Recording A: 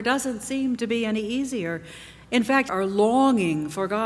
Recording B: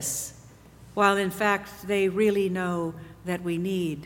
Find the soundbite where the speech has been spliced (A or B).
A